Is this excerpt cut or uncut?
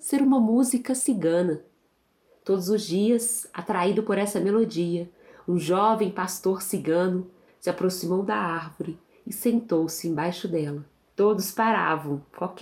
cut